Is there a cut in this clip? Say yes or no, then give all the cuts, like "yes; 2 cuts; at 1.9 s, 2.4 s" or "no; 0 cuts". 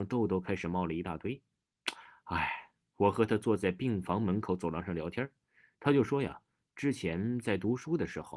no; 0 cuts